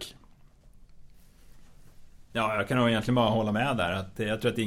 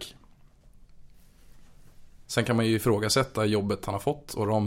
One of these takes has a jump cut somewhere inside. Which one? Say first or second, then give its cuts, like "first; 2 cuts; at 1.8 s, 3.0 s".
second; 1 cut; at 2.3 s